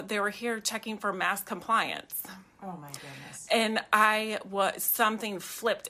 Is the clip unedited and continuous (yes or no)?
yes